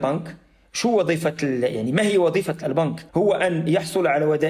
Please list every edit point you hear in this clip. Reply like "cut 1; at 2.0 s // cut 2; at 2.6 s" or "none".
cut 1; at 3.1 s